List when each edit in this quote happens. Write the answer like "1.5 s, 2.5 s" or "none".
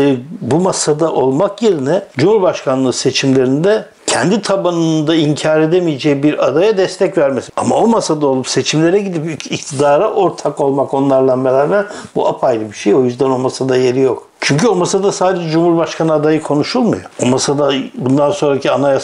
7.5 s